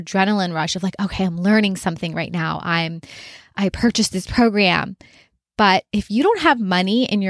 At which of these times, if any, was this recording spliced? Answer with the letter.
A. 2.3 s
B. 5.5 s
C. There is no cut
C